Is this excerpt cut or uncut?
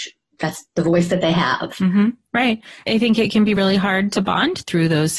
uncut